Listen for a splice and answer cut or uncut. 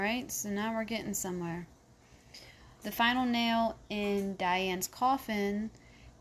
cut